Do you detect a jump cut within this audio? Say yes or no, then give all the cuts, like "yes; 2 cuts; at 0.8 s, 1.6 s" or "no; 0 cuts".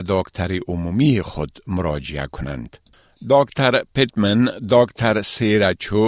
no; 0 cuts